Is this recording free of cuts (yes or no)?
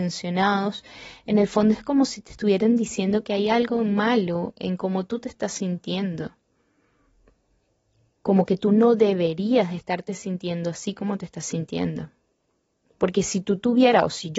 no